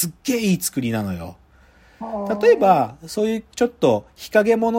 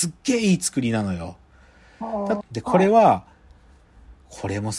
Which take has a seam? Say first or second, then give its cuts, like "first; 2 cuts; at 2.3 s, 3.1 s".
second; 1 cut; at 2.4 s